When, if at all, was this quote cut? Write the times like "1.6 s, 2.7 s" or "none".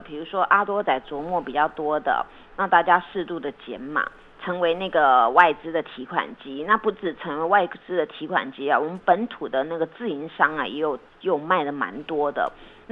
4.3 s

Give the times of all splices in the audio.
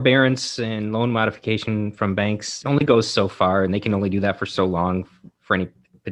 none

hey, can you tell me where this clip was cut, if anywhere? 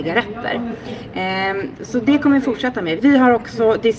3.0 s

